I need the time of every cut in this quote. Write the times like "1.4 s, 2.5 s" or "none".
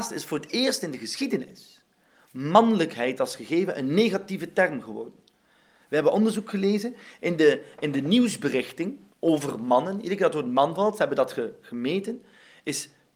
none